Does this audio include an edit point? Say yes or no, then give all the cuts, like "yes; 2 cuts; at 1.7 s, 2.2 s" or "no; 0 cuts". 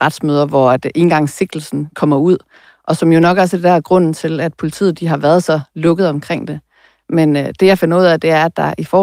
no; 0 cuts